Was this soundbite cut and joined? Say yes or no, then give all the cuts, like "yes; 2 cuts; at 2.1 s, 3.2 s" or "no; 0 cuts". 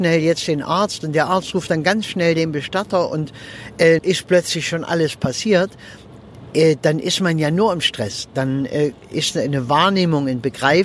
yes; 1 cut; at 4.0 s